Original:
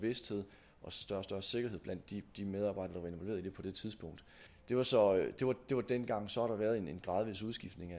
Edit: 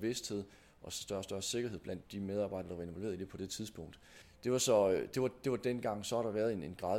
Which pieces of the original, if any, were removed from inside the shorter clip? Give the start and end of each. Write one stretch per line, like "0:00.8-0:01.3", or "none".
0:02.0-0:02.3